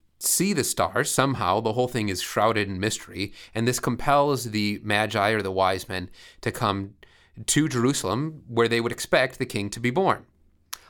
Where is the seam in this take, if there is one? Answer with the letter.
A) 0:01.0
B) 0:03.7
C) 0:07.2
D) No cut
D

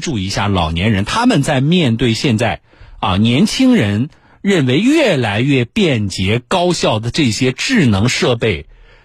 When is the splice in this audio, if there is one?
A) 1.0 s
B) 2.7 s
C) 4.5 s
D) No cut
D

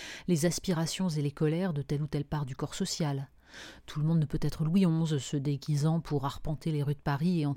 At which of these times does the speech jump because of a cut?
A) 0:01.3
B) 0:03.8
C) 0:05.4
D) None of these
D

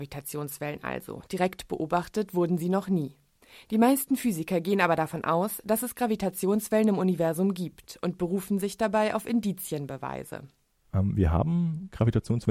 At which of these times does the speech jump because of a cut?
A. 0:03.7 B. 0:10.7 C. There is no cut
C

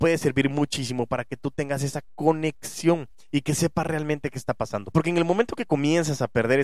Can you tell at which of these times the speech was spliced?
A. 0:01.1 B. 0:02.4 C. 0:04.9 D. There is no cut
C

